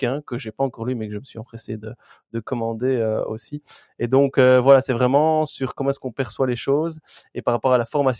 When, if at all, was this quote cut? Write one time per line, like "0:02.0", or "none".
none